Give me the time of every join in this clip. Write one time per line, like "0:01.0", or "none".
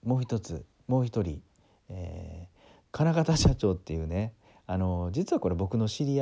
none